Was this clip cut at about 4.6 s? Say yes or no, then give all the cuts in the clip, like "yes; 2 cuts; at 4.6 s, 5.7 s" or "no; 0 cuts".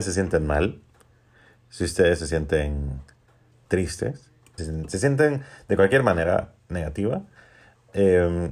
yes; 1 cut; at 4.6 s